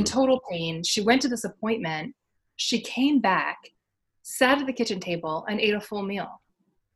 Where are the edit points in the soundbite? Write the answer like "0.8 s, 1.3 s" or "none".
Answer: none